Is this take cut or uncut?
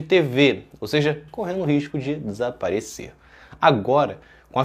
cut